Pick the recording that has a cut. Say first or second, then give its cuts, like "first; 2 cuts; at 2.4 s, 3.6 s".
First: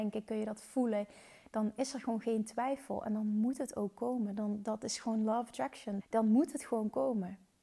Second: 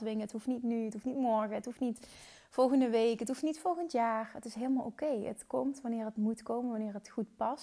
first; 1 cut; at 6.0 s